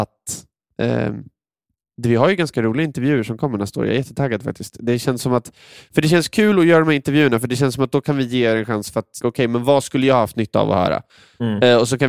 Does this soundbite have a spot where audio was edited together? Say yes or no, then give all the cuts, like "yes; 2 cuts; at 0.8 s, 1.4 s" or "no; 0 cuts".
yes; 1 cut; at 9.2 s